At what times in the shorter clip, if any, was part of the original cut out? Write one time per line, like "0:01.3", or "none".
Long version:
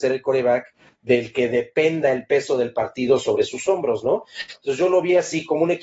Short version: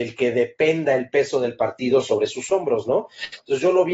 none